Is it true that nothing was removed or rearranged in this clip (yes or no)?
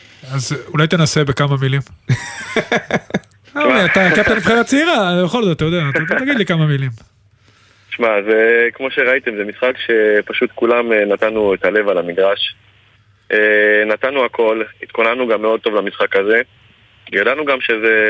yes